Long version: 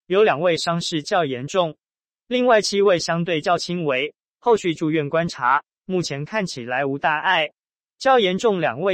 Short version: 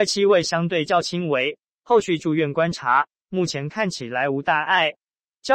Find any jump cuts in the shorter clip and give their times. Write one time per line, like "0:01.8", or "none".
none